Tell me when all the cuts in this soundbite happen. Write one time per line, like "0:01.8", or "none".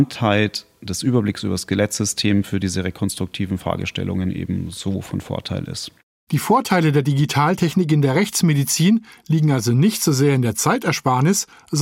none